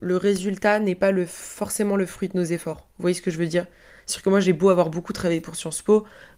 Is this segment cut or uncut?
uncut